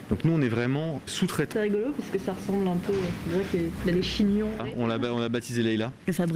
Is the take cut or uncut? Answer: cut